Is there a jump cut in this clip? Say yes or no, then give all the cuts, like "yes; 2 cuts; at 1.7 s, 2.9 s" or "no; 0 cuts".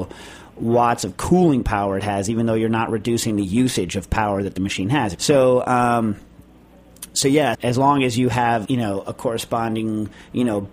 yes; 3 cuts; at 5.2 s, 7.5 s, 8.7 s